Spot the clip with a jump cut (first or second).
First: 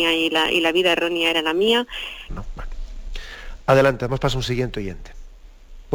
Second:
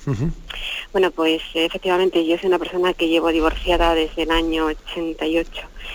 first